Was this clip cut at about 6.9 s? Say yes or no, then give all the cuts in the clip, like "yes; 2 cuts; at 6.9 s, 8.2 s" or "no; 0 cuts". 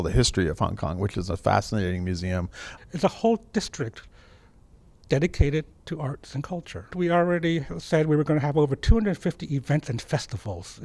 yes; 2 cuts; at 2.8 s, 6.9 s